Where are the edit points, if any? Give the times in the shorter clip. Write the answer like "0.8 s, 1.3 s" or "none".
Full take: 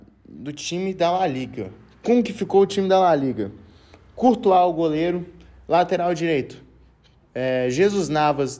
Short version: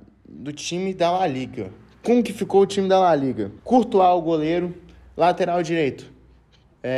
3.6 s